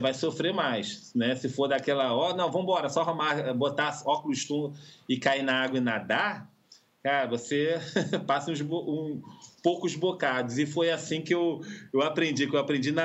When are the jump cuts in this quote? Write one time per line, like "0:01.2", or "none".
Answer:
none

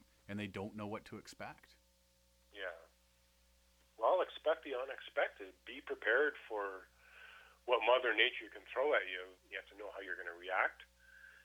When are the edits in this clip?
0:05.6
0:09.4

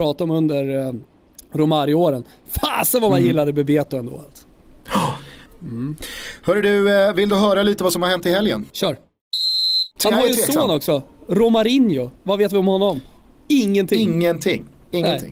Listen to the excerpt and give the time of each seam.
0:05.5
0:08.7
0:10.0

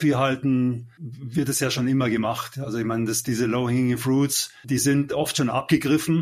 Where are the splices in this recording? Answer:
none

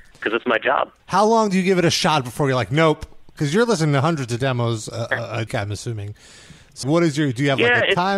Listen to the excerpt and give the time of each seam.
0:01.0
0:05.5
0:06.8

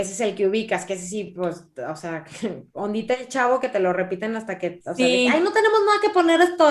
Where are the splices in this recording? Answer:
none

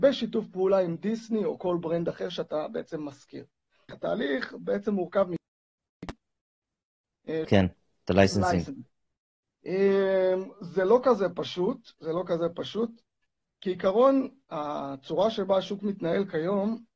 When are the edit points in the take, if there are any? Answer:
0:03.9
0:07.4

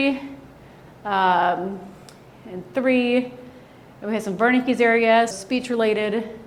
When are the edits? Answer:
0:05.3

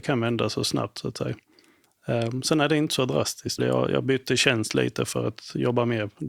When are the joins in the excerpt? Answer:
0:03.6

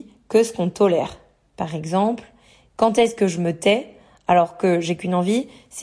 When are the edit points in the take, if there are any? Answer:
0:01.4

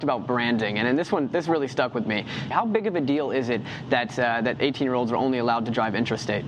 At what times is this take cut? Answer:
0:02.5

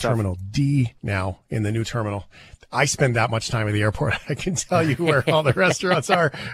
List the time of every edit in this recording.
0:01.0

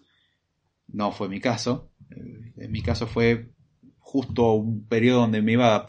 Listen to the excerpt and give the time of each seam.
none

